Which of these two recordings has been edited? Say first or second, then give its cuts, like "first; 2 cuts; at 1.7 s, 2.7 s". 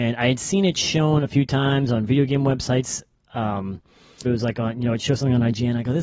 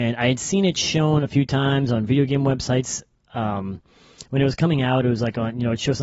first; 1 cut; at 4.2 s